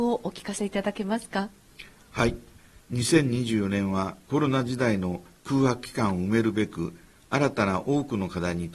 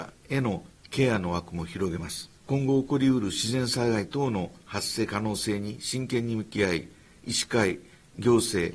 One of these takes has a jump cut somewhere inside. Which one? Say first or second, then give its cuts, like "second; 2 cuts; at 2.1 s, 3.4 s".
second; 1 cut; at 2.3 s